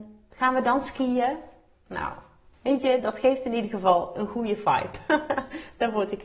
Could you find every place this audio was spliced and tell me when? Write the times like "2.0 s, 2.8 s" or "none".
none